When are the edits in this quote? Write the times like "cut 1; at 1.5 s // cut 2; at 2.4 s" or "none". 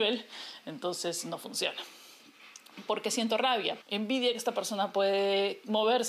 cut 1; at 3.8 s